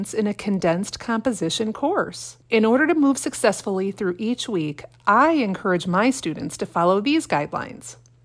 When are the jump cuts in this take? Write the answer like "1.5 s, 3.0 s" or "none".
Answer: 2.4 s